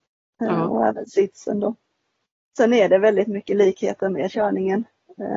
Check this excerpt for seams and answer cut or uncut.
cut